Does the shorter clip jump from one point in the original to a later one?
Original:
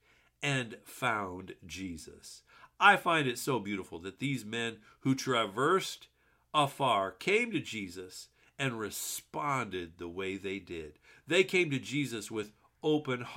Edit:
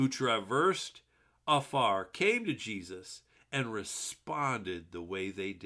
no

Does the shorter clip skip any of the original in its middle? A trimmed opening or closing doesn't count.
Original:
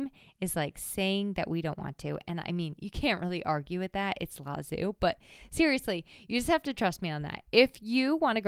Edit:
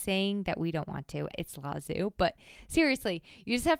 yes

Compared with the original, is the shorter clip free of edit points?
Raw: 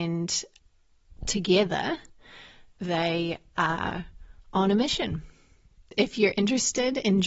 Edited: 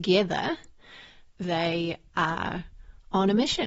yes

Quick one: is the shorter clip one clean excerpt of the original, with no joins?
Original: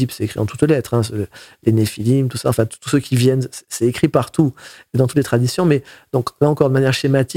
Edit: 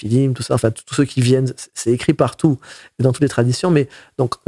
yes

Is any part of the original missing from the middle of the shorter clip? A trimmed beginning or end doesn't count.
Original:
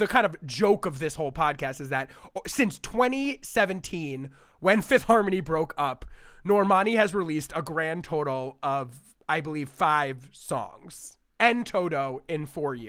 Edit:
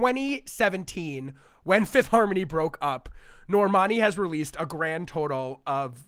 no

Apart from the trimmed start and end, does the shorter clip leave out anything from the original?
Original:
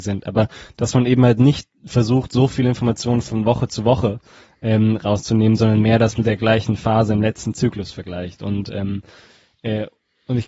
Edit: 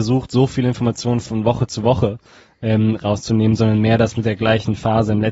no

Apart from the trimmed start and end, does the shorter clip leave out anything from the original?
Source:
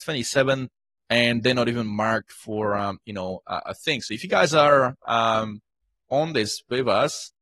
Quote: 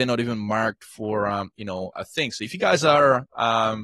yes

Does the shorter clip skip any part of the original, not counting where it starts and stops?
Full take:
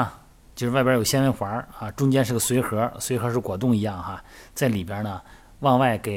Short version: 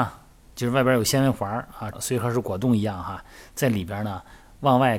yes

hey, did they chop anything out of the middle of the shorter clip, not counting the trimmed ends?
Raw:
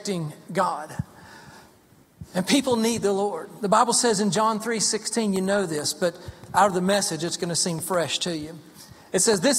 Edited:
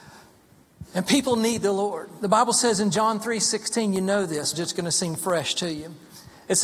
yes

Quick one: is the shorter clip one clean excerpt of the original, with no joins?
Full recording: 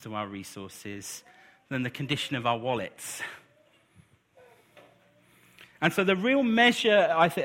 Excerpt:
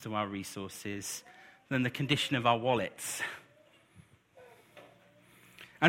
yes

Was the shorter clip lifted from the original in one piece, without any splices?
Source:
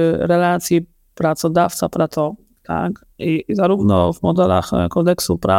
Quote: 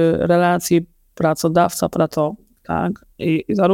yes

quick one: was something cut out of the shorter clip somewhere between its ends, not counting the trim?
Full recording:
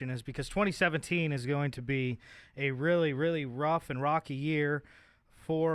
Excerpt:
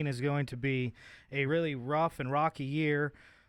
yes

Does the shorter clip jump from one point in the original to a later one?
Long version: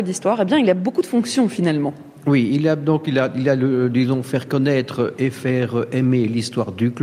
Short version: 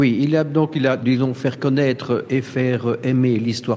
yes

